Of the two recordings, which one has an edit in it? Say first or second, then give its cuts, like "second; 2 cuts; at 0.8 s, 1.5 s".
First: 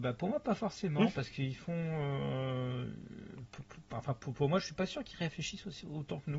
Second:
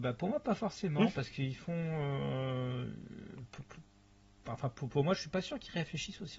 first; 1 cut; at 3.9 s